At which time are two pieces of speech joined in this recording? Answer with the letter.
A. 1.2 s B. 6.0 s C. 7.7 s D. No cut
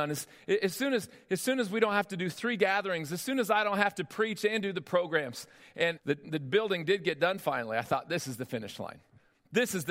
B